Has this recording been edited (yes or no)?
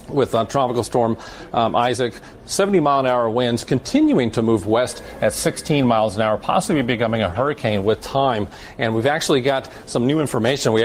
no